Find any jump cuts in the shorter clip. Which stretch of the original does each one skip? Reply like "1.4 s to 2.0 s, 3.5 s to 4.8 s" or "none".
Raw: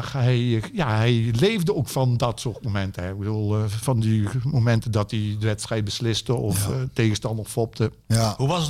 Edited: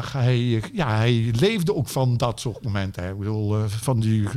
none